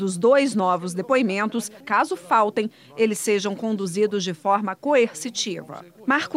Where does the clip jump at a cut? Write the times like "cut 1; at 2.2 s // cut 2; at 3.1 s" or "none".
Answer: cut 1; at 1.8 s